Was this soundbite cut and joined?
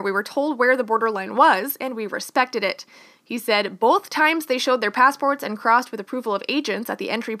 no; 0 cuts

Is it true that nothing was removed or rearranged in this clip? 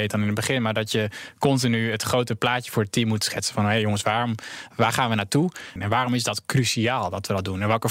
no; 1 cut; at 5.8 s

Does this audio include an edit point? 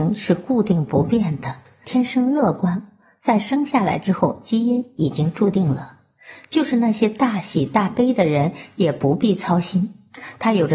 yes; 1 cut; at 1.8 s

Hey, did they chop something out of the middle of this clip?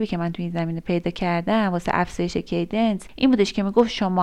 no; 0 cuts

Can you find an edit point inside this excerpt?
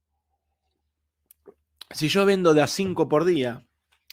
no; 0 cuts

